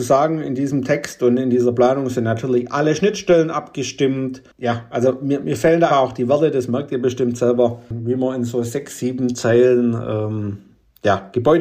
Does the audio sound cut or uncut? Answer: cut